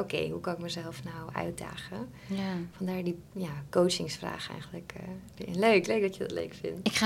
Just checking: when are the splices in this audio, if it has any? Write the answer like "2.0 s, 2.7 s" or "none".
none